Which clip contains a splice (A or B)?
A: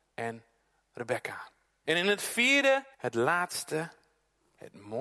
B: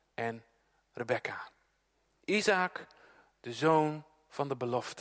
A